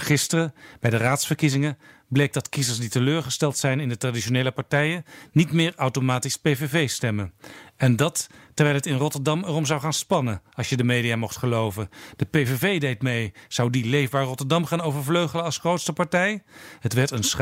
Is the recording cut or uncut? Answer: uncut